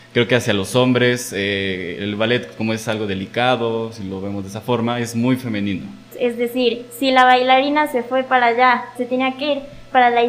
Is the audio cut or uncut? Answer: cut